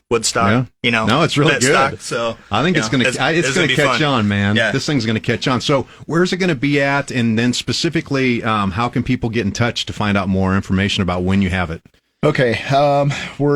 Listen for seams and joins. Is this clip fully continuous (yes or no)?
yes